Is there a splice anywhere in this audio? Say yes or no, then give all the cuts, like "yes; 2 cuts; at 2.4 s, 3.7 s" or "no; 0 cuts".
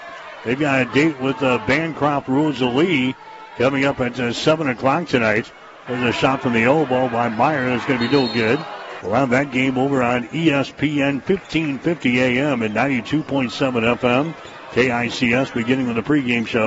yes; 2 cuts; at 5.9 s, 9.0 s